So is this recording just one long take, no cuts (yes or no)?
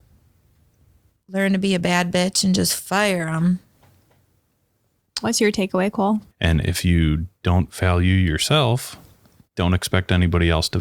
no